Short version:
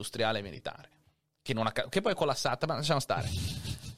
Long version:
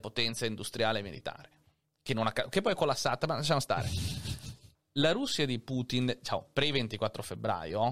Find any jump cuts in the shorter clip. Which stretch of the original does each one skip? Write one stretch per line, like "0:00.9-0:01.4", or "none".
none